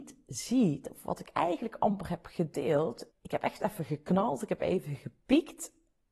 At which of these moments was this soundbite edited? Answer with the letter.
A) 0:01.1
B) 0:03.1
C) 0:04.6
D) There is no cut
B